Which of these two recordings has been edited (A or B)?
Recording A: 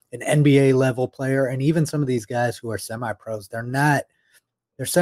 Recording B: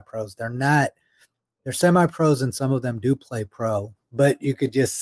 B